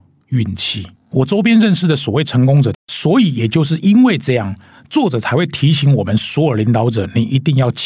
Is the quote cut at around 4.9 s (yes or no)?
no